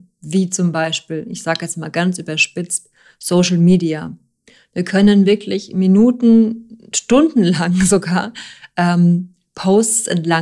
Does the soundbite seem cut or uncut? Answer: uncut